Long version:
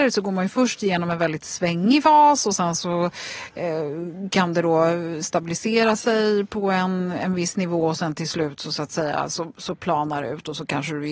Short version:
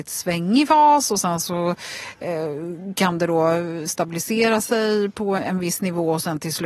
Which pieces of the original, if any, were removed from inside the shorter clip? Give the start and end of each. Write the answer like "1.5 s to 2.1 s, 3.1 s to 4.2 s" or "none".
6.7 s to 7.1 s